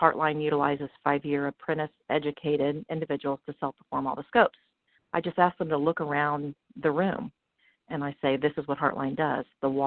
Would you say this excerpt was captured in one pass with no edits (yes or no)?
no